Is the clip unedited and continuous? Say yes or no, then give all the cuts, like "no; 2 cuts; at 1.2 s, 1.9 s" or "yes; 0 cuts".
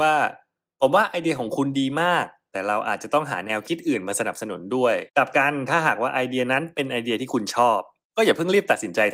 no; 1 cut; at 5.1 s